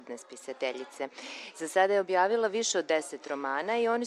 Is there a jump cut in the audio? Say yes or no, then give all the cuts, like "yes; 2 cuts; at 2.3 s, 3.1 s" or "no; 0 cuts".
yes; 1 cut; at 1.5 s